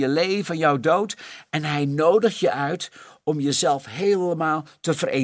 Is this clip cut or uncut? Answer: uncut